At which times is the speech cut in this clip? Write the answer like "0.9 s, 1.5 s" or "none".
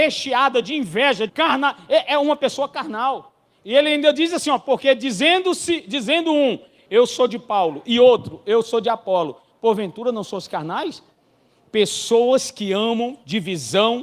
1.3 s